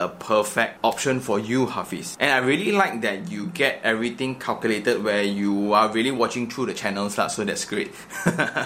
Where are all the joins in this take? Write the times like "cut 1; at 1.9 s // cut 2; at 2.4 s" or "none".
none